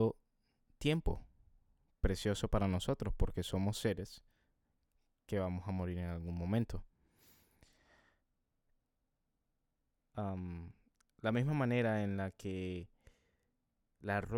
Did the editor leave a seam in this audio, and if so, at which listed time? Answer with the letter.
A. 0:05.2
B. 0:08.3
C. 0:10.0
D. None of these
C